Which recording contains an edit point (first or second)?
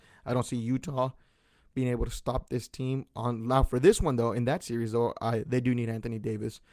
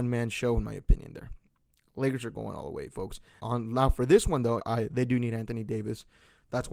second